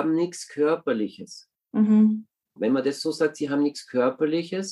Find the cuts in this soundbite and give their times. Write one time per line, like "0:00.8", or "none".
0:02.6